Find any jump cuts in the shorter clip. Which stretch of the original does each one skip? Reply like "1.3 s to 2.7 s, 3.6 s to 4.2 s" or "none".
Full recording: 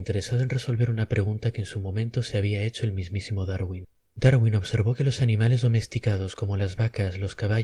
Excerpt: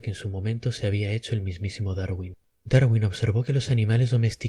none

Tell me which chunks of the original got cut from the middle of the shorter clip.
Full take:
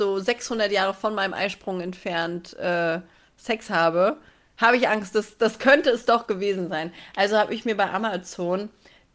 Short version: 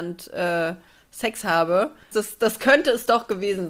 4.4 s to 5.1 s

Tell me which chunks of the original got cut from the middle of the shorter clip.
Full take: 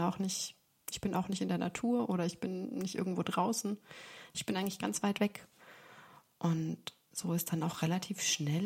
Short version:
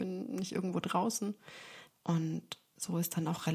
4.3 s to 6.2 s

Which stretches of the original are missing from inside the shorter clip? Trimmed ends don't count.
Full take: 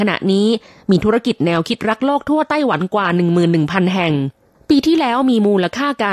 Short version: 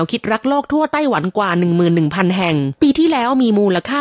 4.3 s to 4.7 s

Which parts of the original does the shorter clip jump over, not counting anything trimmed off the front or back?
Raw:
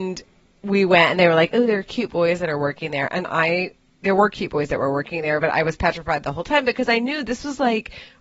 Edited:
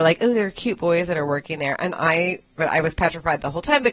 3.9 s to 5.4 s

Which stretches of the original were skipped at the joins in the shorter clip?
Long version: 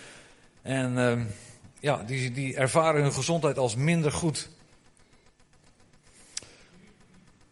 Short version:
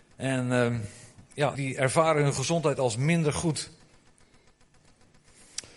2.0 s to 2.3 s

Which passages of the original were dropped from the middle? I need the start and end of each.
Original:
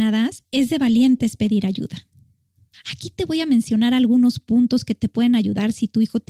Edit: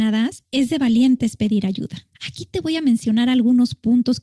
2.1 s to 2.8 s

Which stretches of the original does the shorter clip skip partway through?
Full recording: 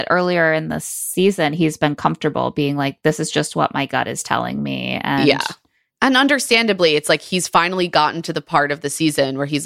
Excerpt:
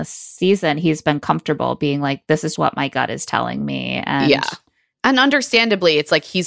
3.3 s to 3.5 s

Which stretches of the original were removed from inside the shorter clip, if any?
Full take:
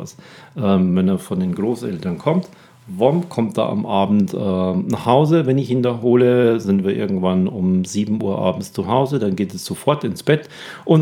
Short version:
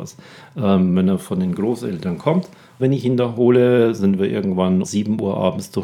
2.8 s to 5.5 s, 7.5 s to 7.9 s

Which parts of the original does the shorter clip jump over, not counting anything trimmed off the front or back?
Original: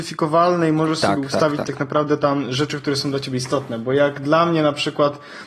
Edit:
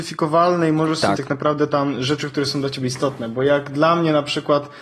1.2 s to 1.7 s

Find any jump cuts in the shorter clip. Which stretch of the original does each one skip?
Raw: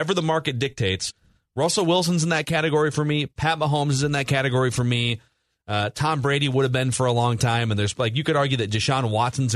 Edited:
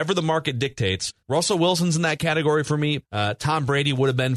1.2 s to 1.5 s, 3.3 s to 5.6 s

